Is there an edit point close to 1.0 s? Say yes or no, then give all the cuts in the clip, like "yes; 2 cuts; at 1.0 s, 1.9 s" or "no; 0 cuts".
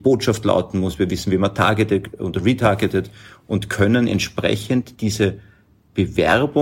no; 0 cuts